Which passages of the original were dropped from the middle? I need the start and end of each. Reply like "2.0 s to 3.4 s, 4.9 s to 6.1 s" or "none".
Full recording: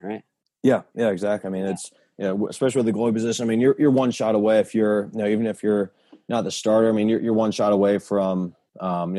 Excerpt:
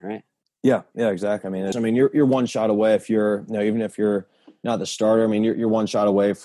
1.7 s to 3.4 s